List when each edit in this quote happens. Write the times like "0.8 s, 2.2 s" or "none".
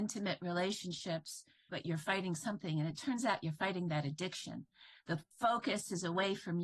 1.7 s